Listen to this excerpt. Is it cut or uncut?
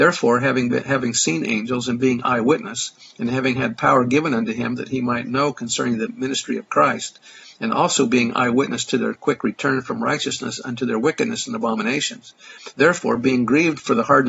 uncut